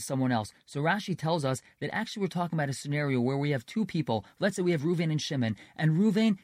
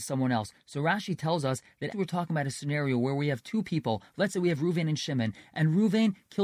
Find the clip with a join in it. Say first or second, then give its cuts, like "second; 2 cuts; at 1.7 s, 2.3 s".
second; 1 cut; at 1.9 s